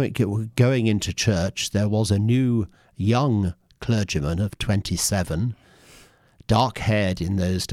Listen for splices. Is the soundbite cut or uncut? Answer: uncut